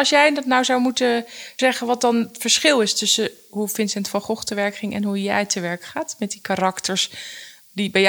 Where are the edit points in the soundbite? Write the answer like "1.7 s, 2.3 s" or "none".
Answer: none